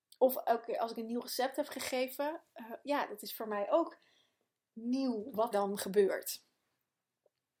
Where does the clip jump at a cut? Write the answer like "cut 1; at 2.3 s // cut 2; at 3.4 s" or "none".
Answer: cut 1; at 2.8 s // cut 2; at 5.5 s

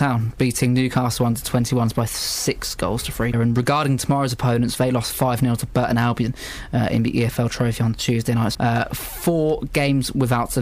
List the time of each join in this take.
cut 1; at 3.3 s // cut 2; at 8.5 s

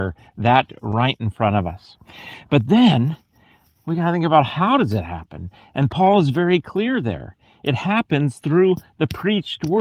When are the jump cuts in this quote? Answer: none

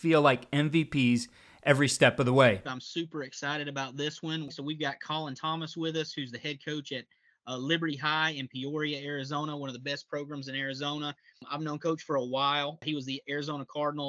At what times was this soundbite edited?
cut 1; at 2.6 s // cut 2; at 4.5 s

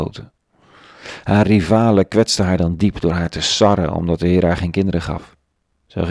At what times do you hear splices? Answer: none

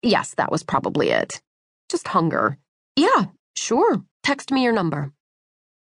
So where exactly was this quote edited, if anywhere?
cut 1; at 2.9 s // cut 2; at 4.1 s

